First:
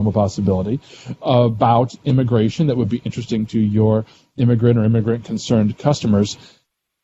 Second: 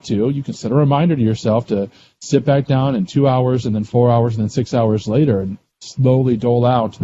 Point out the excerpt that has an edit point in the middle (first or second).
second